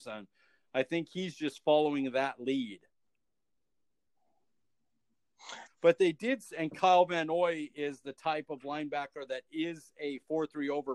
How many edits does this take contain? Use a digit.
1